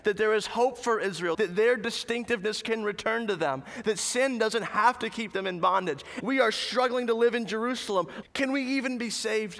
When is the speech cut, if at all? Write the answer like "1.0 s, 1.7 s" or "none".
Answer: 1.3 s, 6.2 s, 8.2 s